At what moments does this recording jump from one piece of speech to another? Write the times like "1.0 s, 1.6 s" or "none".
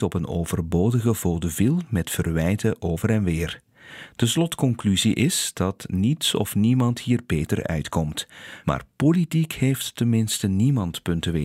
none